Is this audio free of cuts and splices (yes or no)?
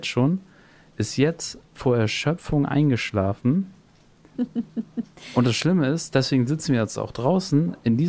no